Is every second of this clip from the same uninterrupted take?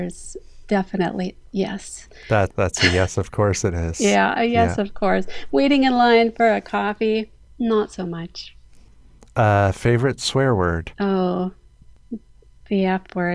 no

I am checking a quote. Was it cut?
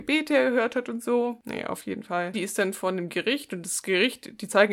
yes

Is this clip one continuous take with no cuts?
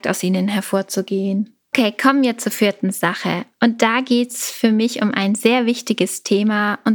no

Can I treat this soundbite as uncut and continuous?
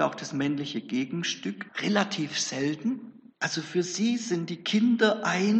no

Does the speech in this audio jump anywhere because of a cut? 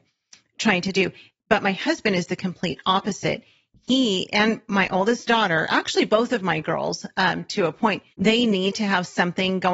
yes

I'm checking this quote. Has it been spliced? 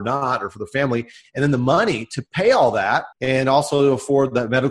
yes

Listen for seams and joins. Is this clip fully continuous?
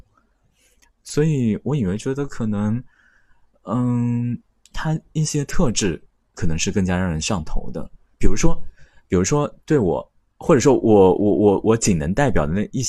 no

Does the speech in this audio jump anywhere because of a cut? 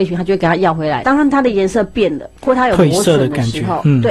yes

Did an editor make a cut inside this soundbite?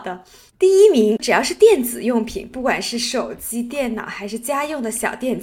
no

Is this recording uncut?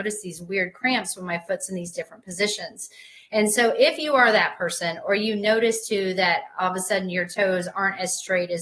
yes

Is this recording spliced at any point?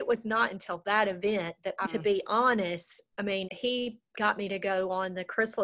yes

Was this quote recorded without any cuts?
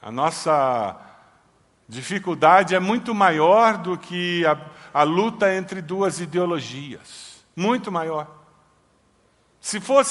yes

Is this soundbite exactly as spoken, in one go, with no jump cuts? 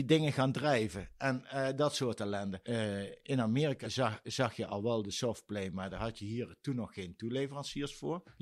yes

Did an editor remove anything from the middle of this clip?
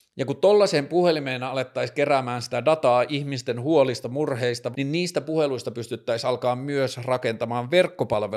yes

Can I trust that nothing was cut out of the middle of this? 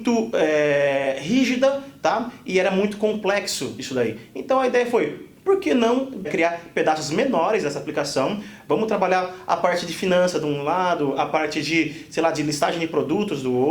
yes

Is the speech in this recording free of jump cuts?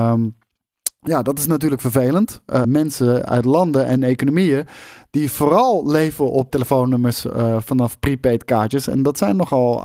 no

